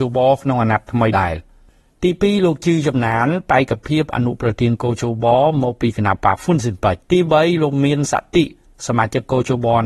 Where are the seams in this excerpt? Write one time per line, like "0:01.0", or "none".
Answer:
0:01.1
0:07.0